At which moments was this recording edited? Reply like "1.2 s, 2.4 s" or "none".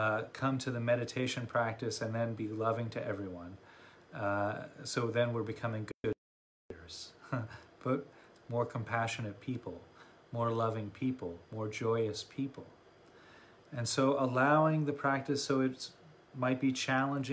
8.3 s